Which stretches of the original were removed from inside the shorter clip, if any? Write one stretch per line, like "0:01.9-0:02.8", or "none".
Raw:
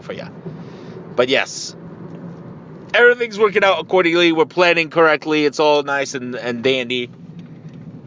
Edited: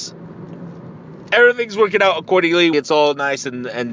0:04.3-0:05.4